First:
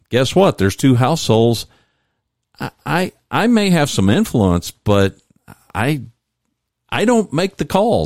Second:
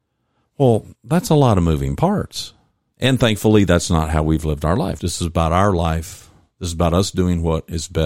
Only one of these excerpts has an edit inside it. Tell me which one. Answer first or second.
second